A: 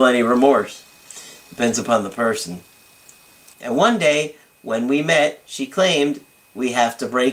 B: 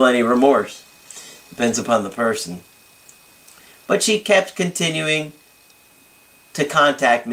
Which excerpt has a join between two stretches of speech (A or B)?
A